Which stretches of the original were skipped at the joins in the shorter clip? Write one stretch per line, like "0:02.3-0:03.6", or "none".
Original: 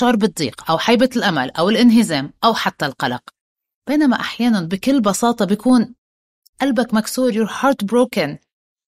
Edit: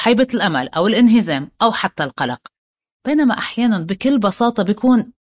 none